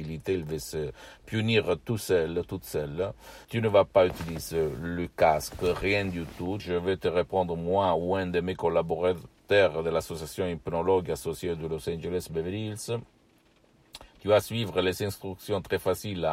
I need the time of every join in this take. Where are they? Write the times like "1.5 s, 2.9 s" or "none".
3.4 s, 6.6 s